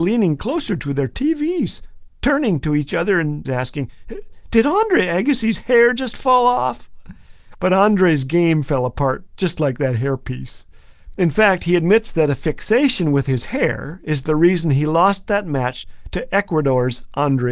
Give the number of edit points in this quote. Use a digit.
2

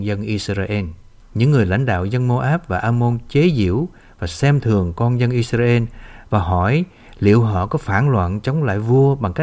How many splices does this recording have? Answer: 1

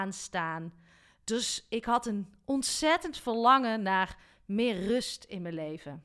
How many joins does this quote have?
1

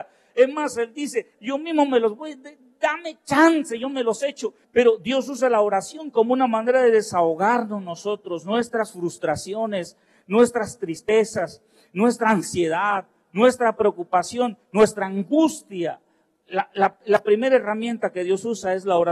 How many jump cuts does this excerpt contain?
2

